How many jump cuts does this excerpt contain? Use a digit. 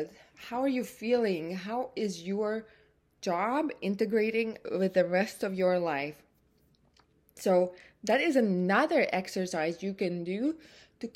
0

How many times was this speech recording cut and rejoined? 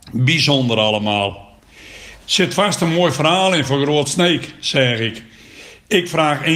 1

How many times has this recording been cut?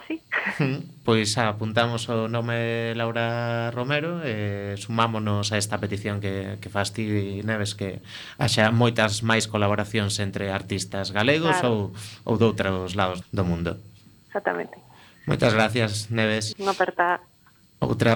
2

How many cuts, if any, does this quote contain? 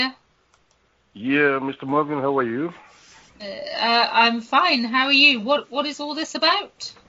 0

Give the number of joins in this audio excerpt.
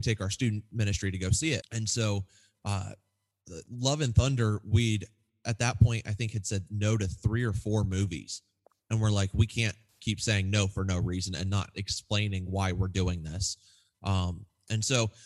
1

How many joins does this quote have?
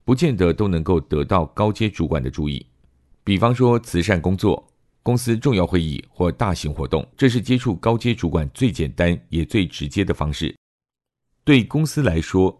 2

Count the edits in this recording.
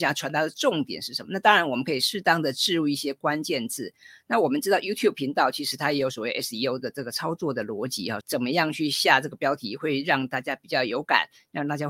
1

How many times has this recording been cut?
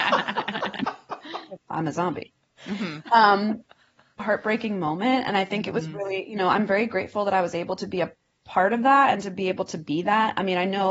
2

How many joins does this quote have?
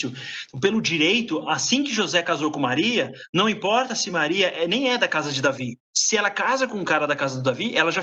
0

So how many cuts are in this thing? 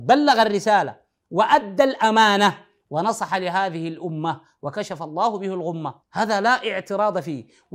1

